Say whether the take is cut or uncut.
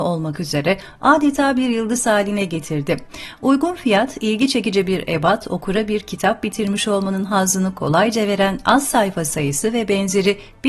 uncut